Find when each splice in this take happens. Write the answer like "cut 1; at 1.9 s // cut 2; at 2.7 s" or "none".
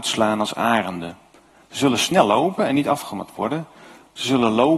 none

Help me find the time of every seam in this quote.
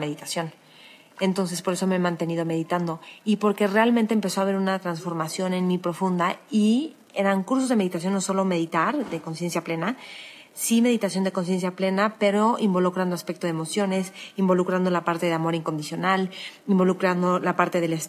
none

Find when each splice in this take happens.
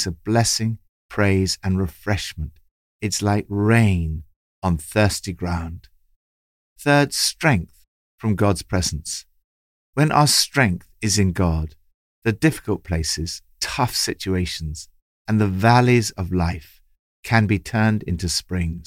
none

